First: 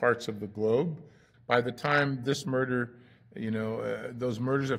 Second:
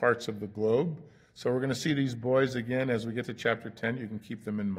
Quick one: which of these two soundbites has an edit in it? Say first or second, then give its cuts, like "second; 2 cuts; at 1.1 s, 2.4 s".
first; 1 cut; at 1.3 s